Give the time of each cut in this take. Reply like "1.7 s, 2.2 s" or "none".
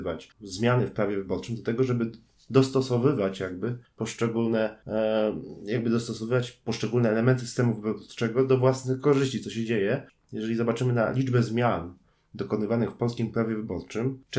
none